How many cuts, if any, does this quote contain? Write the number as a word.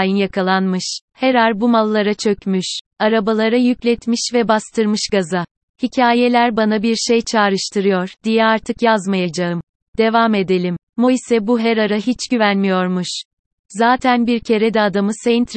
two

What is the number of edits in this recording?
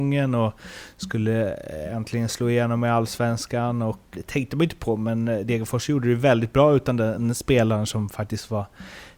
one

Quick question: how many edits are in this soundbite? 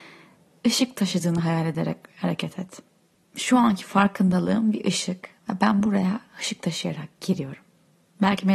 zero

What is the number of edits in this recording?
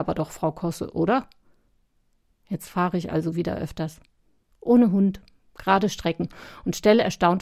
zero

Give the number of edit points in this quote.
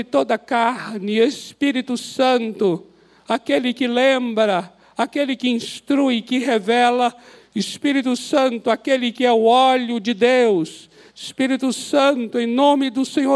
one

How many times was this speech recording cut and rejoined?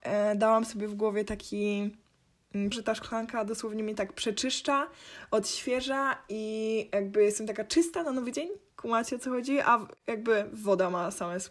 one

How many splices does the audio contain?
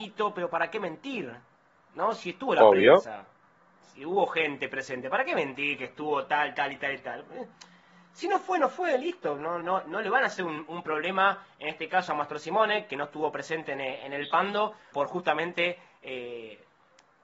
two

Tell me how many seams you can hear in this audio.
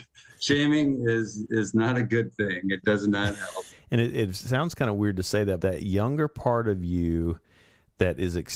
two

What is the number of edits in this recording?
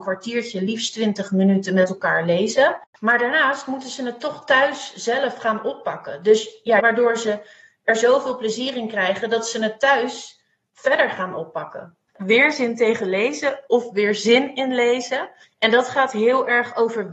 two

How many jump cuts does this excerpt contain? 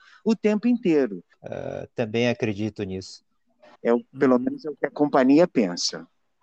two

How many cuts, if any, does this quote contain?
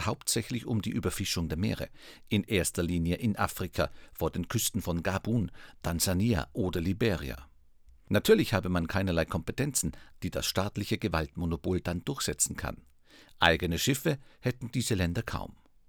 one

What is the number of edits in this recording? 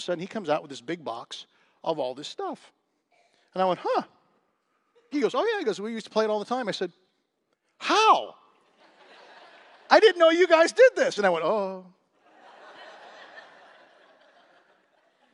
two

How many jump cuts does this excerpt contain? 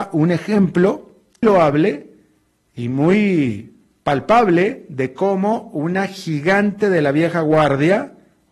one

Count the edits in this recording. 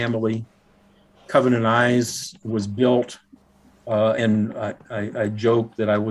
zero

